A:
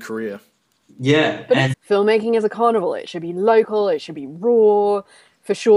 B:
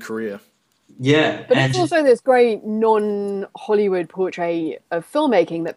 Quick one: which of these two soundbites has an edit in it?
A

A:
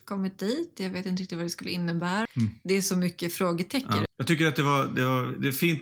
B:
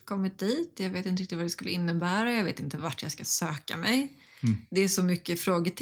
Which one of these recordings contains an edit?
A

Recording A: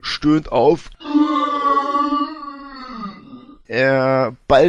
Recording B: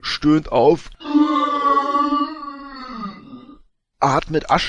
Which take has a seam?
A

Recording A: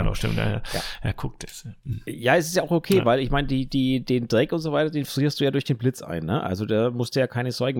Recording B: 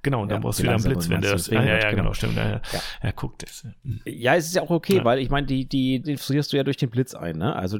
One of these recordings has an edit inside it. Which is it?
B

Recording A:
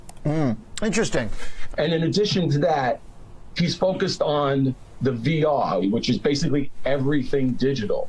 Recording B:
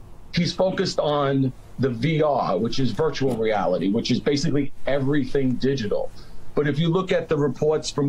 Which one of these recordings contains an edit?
A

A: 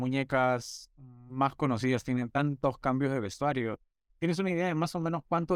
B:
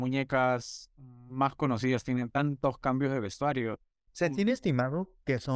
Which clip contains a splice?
B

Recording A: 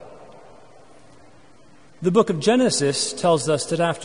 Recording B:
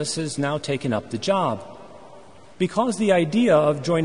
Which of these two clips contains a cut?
B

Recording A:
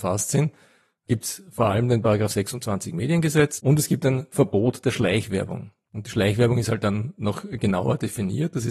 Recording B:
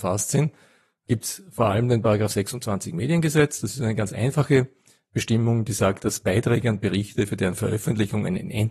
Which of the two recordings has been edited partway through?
A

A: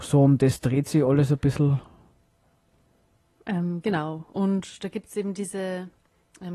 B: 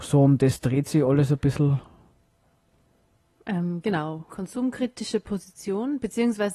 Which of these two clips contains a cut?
B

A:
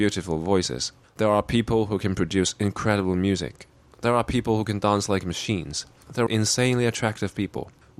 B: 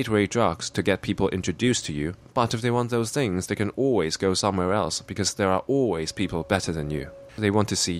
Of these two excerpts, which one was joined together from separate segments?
A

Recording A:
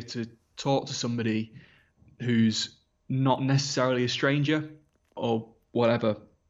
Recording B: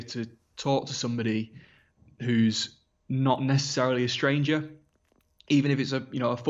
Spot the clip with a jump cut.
A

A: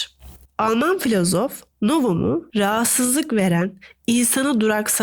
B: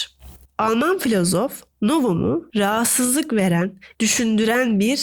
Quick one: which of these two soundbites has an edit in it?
B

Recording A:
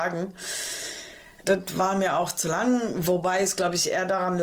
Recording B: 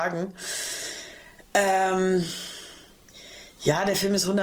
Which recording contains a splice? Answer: A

